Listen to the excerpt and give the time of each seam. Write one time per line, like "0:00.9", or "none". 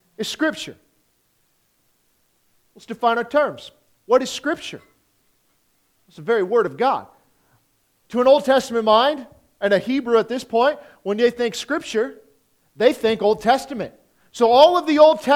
none